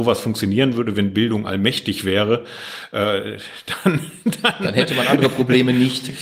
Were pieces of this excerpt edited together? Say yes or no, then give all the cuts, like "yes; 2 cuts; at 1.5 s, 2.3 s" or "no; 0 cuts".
no; 0 cuts